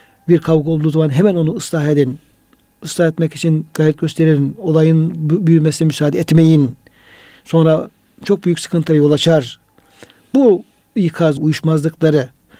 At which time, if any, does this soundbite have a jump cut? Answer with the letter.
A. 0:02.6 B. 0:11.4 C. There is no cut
B